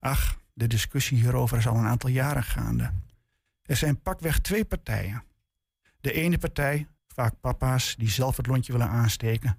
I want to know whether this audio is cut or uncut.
cut